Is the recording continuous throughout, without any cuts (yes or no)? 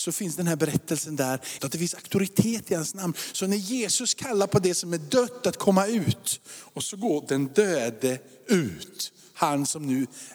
no